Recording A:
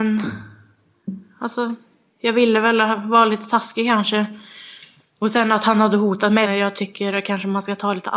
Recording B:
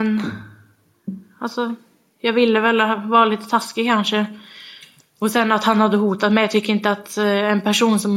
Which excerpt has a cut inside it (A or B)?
A